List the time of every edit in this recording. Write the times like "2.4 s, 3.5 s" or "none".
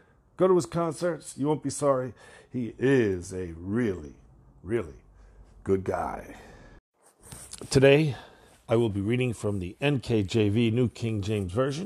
none